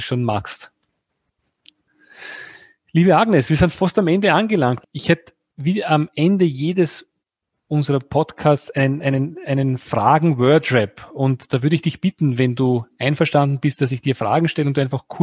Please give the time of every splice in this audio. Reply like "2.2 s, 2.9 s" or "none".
4.8 s